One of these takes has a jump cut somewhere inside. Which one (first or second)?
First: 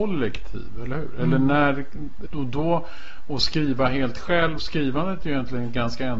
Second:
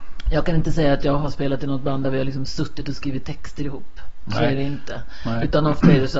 first